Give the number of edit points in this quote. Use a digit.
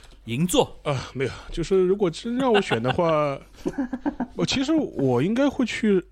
0